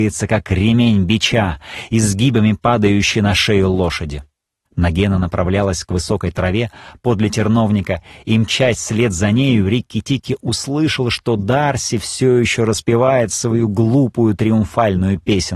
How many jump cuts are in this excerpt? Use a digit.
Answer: 1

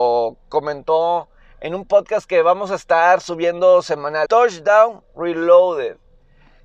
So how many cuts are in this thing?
1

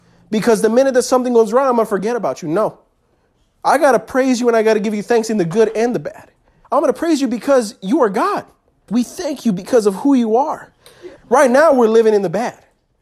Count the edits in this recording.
3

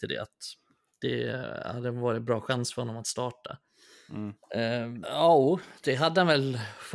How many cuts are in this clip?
1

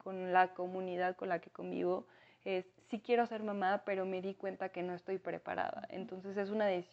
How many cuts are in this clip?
0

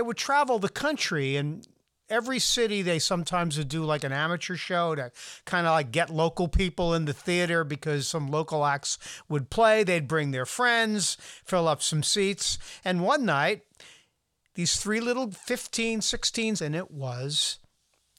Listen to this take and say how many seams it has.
1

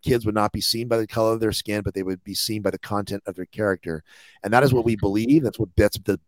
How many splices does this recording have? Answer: 0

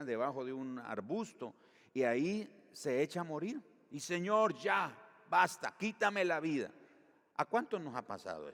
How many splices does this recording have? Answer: 0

